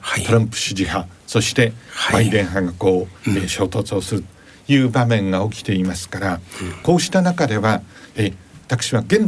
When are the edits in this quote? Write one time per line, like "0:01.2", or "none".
none

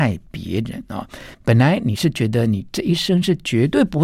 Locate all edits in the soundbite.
0:01.3

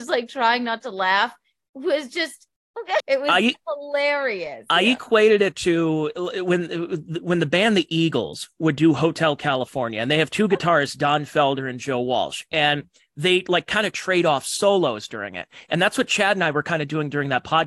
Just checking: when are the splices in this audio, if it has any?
0:03.0

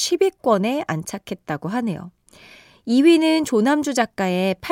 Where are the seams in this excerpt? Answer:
none

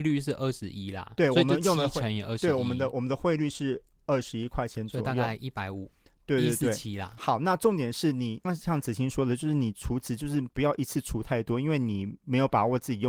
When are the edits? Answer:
0:08.4

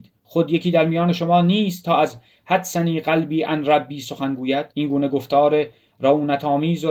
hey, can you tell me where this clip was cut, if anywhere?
0:04.7

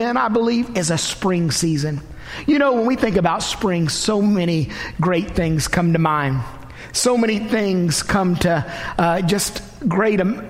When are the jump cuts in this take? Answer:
none

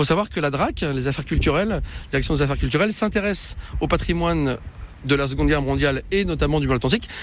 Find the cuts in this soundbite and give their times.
none

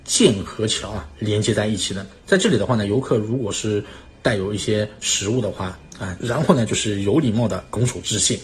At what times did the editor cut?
0:02.2
0:06.2

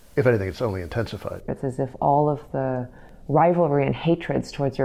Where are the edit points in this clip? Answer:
0:01.5

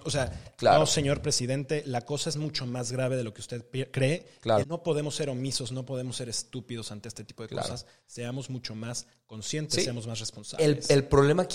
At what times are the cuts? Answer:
0:04.6

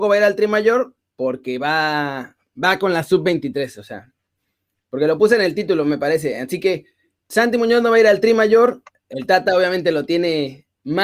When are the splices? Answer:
none

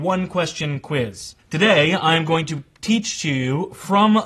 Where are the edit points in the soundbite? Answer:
0:01.4

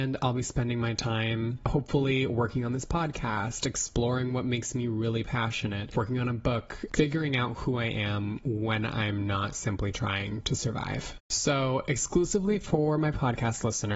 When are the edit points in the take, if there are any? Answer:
0:06.9
0:11.2

